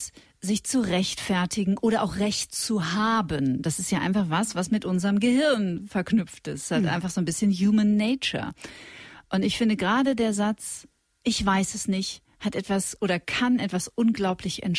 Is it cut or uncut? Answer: uncut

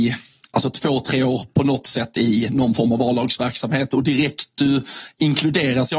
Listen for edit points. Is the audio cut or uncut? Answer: uncut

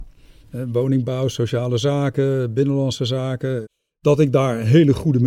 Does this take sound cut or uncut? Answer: uncut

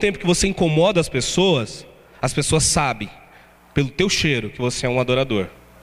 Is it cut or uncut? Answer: uncut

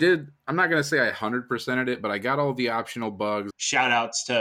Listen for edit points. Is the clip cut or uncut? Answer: cut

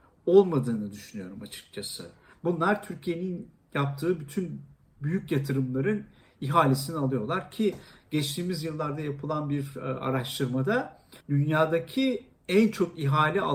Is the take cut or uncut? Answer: cut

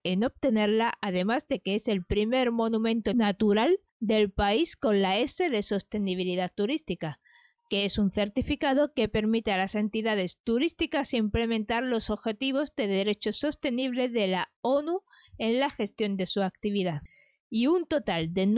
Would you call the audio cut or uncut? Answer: uncut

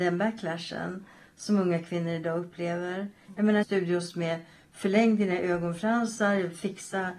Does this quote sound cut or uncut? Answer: cut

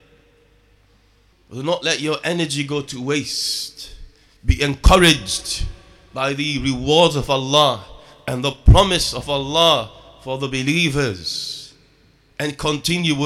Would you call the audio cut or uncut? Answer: cut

